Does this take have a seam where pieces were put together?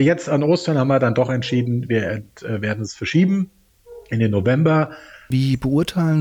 yes; 1 cut; at 5.3 s

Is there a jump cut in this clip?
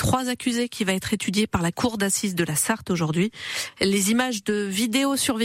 no; 0 cuts

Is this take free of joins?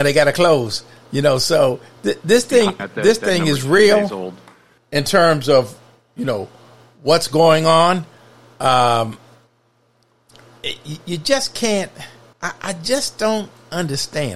no; 2 cuts; at 2.8 s, 12.3 s

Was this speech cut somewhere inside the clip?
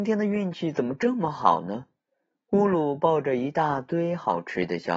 no; 0 cuts

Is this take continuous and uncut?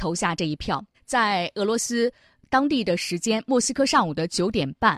no; 1 cut; at 0.9 s

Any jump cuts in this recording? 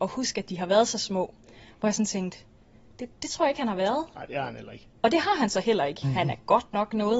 yes; 2 cuts; at 3.1 s, 6.0 s

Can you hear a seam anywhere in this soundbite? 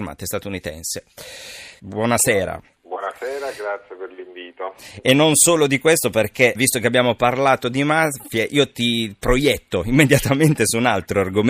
yes; 2 cuts; at 1.8 s, 6.5 s

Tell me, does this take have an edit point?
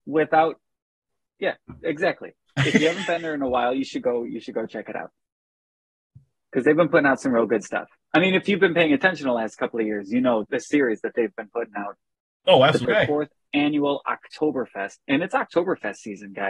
yes; 2 cuts; at 10.4 s, 12.8 s

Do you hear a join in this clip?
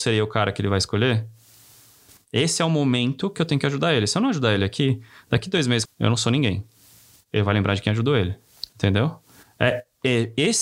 yes; 2 cuts; at 5.9 s, 8.7 s

